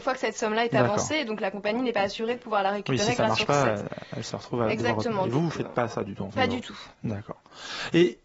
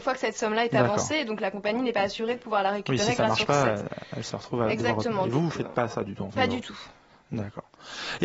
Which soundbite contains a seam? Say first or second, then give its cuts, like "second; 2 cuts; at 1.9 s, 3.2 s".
first; 1 cut; at 6.9 s